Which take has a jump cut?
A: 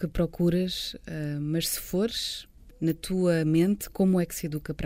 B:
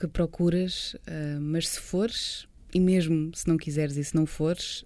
A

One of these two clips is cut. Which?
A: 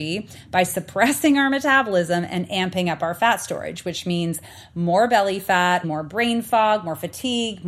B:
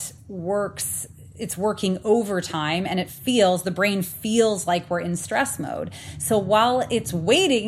A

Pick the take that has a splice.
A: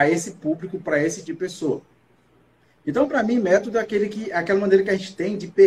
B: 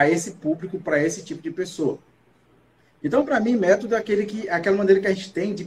A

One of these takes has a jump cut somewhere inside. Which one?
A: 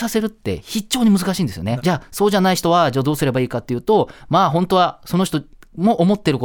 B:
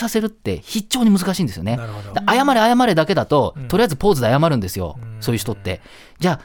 A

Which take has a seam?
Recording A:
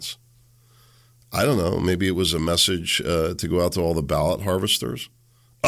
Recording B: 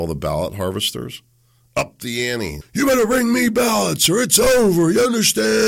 B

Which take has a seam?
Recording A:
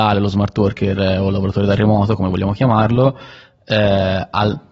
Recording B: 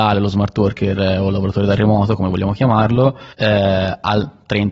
B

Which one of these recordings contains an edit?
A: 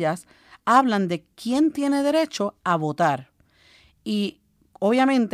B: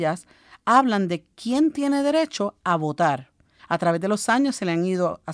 B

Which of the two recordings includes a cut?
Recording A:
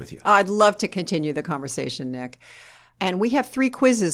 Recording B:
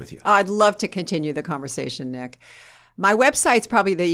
A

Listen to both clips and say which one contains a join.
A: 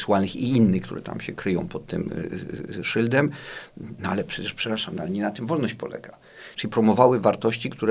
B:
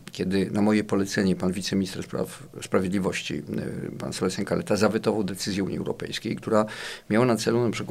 A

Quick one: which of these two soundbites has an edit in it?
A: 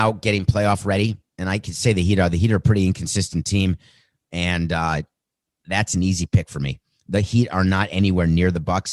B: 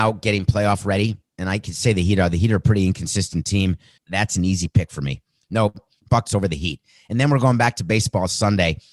B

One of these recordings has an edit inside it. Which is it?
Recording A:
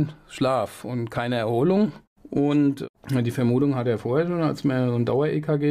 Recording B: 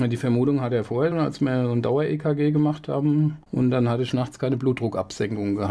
B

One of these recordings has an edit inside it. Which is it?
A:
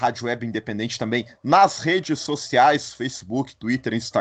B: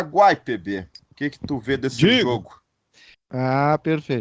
B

